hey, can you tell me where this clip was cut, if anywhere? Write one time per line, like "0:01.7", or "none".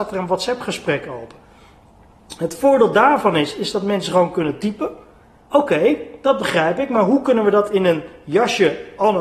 0:05.4